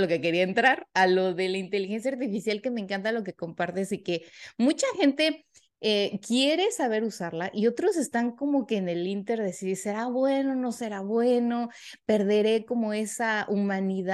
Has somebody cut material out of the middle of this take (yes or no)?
no